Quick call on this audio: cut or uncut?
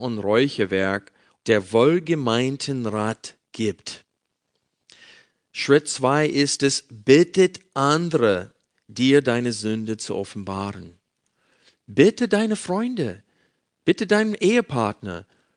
cut